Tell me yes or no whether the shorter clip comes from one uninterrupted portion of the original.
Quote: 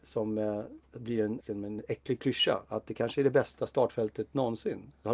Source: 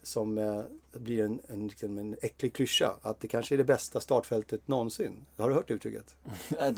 no